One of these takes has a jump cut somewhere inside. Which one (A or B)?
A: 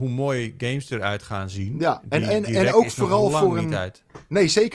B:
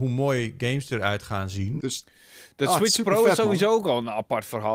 B